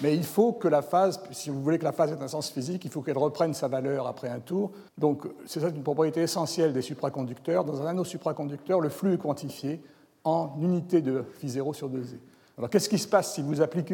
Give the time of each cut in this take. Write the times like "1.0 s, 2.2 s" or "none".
4.9 s